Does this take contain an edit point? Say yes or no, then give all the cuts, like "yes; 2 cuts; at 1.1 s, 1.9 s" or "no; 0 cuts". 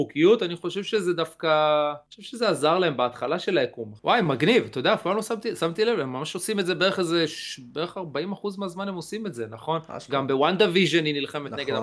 no; 0 cuts